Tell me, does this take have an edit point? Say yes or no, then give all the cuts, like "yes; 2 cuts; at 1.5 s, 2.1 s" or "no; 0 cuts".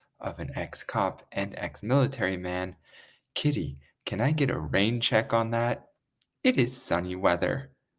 no; 0 cuts